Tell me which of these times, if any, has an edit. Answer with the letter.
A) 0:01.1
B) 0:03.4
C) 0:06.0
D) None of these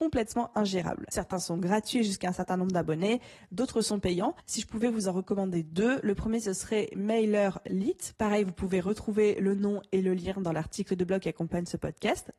A